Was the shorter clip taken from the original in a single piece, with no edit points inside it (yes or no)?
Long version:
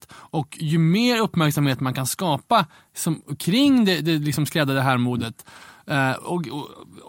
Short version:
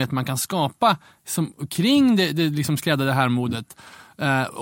yes